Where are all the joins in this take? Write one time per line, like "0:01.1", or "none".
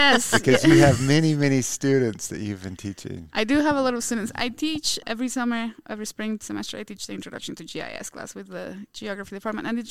none